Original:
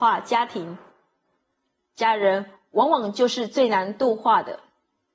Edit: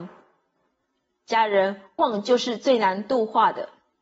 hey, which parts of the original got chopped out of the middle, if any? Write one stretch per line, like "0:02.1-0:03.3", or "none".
0:02.7-0:02.9